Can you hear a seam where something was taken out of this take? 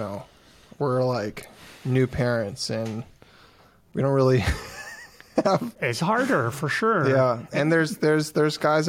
no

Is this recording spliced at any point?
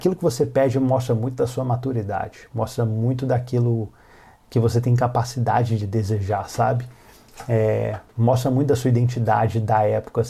no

